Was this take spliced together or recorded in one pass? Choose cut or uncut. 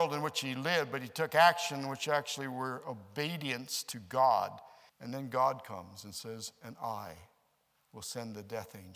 cut